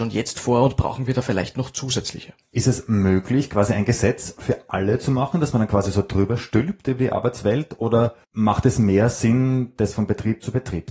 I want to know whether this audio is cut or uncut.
cut